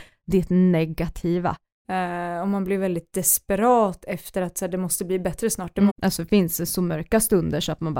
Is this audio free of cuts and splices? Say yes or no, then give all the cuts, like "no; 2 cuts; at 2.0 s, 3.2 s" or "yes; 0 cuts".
no; 2 cuts; at 1.8 s, 5.9 s